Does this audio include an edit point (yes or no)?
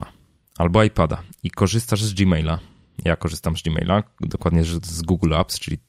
no